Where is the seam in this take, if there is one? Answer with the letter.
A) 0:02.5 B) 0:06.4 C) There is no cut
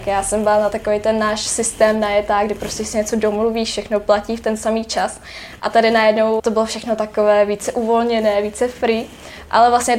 B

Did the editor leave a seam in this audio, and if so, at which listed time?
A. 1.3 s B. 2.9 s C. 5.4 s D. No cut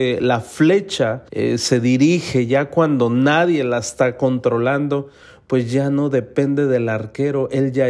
A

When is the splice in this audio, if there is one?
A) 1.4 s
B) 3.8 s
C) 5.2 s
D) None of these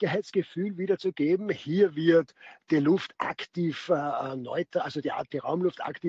D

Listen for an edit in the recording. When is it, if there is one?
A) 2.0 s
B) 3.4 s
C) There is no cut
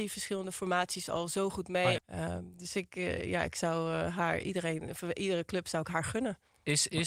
A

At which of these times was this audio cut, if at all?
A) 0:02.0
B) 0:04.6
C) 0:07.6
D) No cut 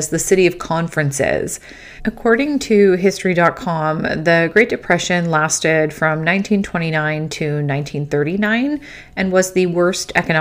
A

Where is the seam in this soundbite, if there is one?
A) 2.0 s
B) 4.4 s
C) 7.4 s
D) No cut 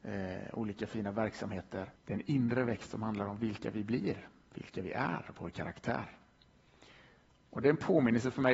A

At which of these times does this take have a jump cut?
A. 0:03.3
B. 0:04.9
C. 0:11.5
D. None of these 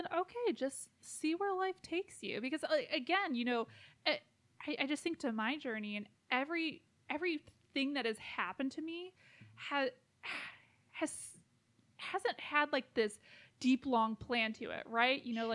D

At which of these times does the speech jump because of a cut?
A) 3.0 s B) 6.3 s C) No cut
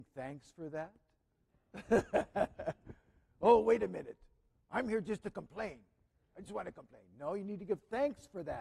C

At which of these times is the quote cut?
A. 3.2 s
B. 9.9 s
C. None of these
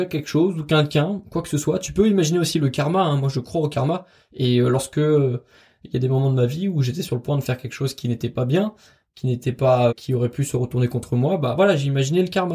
B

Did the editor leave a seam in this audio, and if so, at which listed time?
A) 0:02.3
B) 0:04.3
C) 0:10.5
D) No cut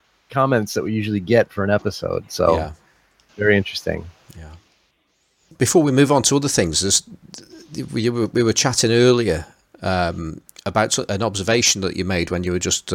D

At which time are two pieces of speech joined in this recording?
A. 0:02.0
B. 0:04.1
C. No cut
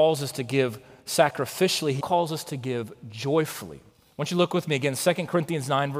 A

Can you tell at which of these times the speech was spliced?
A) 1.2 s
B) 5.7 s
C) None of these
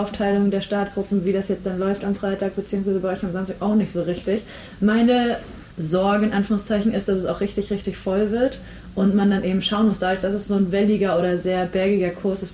B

